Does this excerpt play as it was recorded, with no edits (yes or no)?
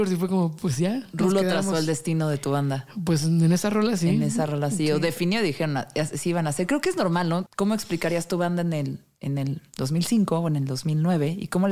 no